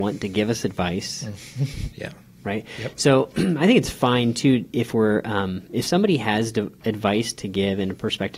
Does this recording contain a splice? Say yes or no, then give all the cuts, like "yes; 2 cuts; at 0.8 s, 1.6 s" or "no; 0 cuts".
yes; 1 cut; at 1.9 s